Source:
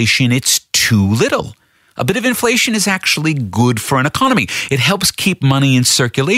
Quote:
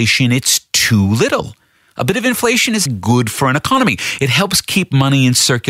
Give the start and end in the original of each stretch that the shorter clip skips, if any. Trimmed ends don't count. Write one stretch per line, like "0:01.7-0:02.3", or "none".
0:02.9-0:03.4